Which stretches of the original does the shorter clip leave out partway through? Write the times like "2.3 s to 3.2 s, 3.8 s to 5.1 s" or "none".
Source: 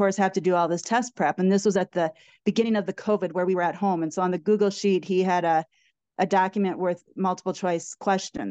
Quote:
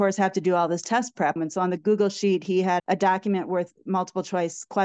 1.4 s to 4.0 s, 5.4 s to 6.1 s